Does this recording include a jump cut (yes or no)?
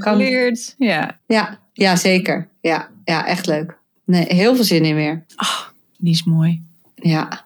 yes